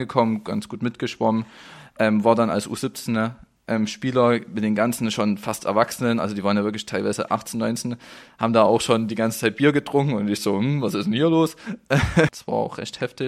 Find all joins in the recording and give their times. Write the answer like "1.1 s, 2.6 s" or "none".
12.3 s